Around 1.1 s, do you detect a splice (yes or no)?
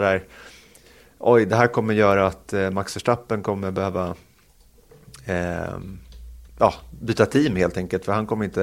no